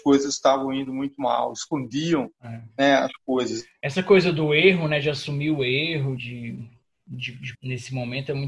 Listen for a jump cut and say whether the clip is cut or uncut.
cut